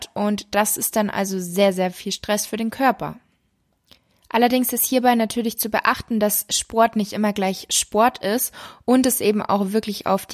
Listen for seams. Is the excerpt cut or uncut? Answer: uncut